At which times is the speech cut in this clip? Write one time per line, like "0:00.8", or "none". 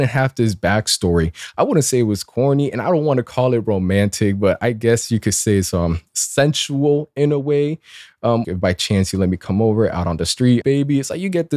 0:08.4
0:10.6